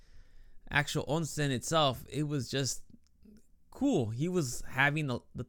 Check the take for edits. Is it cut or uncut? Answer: uncut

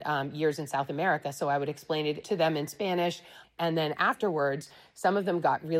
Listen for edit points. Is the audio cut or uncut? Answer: cut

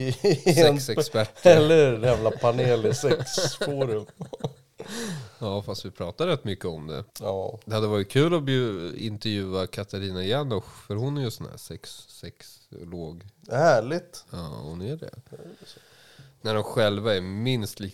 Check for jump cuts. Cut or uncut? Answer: cut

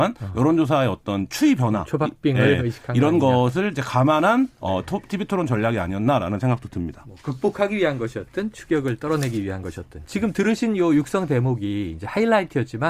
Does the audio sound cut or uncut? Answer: uncut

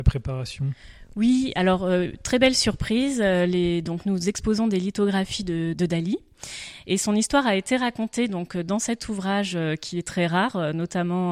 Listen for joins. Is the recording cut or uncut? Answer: cut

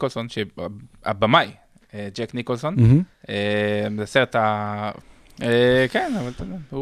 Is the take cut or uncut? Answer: cut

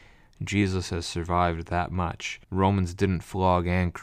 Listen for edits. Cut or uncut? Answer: cut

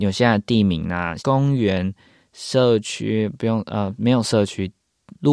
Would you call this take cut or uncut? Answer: cut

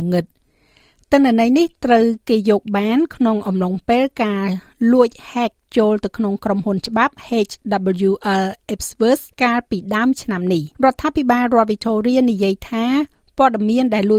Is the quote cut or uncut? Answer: cut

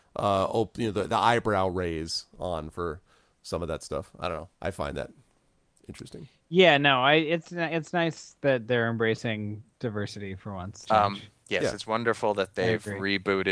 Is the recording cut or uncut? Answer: cut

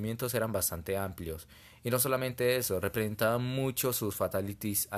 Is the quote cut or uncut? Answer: uncut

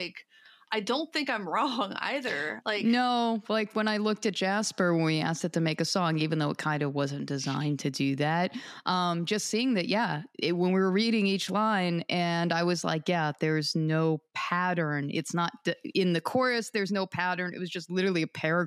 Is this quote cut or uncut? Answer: uncut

